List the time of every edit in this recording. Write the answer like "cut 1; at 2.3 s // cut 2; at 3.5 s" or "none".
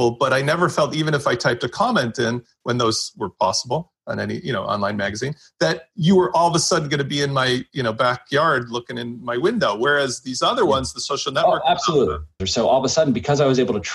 cut 1; at 12.4 s